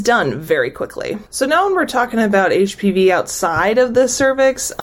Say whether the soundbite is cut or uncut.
cut